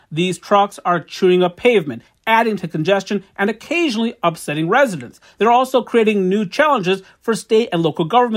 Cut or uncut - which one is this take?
uncut